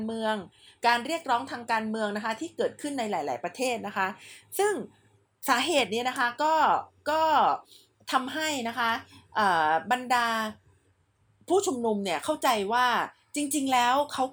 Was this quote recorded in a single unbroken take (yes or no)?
yes